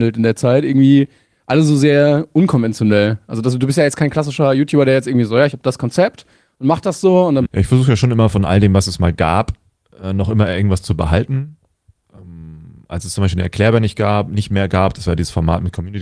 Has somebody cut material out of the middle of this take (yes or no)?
yes